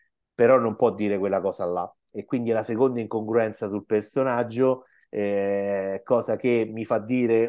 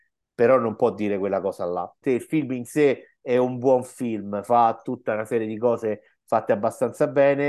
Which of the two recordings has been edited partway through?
second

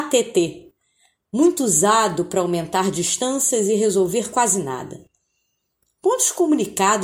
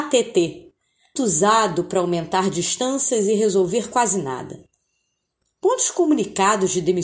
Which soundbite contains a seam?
second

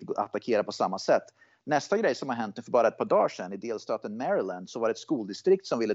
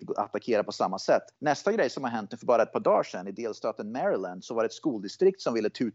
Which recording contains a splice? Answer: second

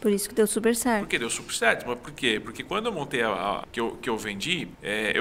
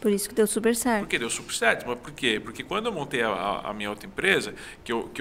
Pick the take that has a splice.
first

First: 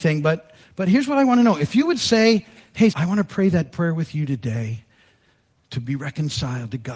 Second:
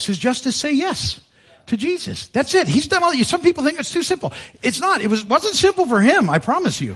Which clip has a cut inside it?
first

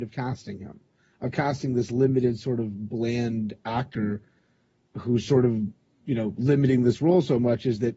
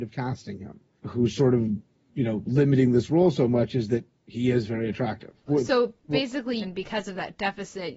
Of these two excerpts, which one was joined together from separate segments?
second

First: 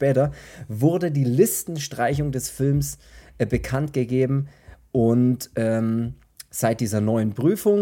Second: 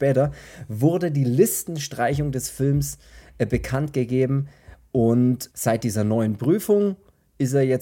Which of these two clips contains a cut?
second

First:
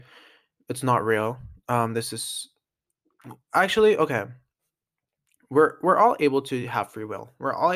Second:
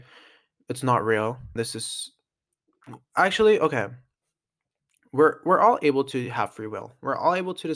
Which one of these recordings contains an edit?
second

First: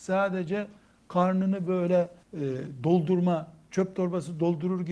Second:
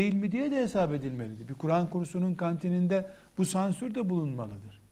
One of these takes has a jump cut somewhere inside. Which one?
first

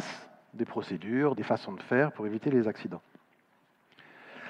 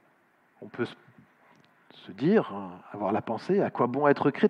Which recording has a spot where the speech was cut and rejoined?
first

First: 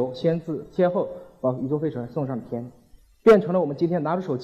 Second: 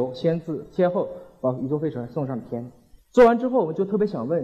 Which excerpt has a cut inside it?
second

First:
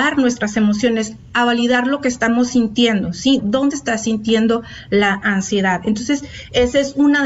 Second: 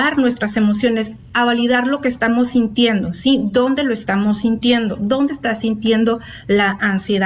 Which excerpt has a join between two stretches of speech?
first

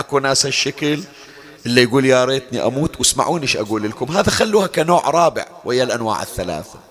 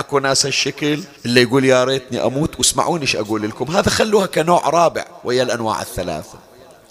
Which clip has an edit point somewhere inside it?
second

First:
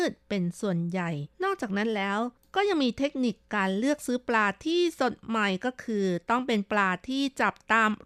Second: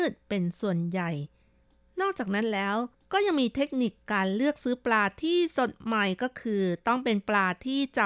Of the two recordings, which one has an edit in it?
first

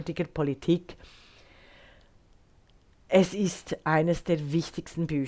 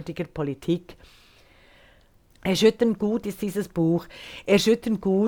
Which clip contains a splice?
second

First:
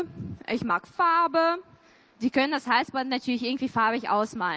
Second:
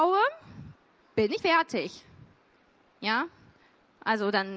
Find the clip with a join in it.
second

